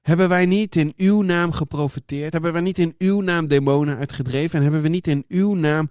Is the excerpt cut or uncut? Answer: uncut